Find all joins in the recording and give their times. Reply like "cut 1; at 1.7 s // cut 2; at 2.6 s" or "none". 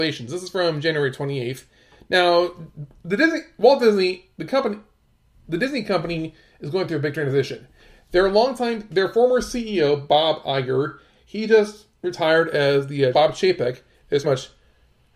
cut 1; at 13.1 s // cut 2; at 14.2 s